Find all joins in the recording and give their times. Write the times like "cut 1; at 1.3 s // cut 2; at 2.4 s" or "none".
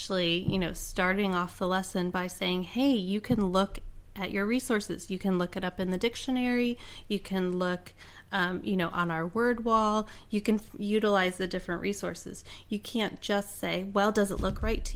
none